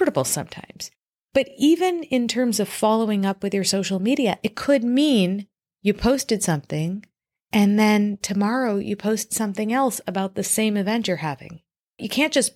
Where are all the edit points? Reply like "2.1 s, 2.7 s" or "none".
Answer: none